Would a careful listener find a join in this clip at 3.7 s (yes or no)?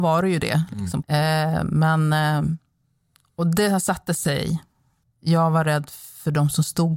no